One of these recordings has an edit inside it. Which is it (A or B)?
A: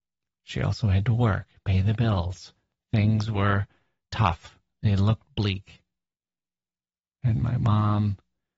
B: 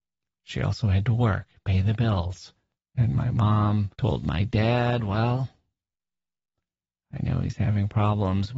B